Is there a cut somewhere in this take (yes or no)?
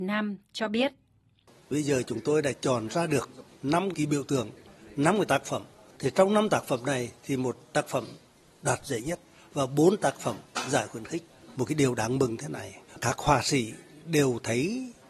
no